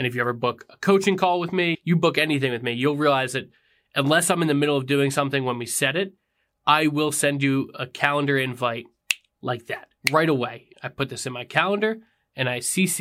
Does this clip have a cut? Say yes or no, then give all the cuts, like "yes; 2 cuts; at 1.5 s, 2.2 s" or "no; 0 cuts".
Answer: yes; 2 cuts; at 1.7 s, 10.7 s